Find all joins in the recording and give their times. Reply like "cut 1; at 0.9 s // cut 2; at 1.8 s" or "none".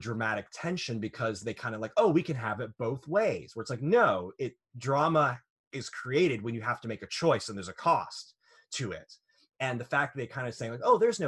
none